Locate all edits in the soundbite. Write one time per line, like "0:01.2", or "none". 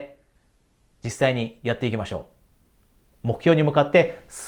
0:03.1